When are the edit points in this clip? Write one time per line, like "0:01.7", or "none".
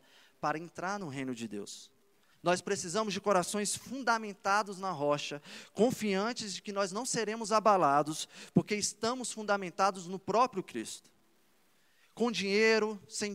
0:02.3